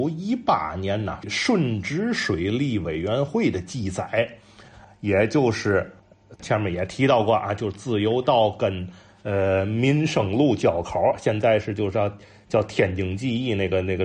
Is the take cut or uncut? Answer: uncut